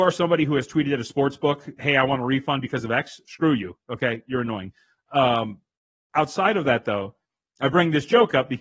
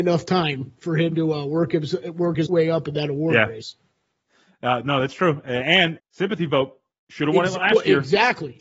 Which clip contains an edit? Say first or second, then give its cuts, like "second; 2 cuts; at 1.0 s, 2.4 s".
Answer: second; 2 cuts; at 2.5 s, 6.0 s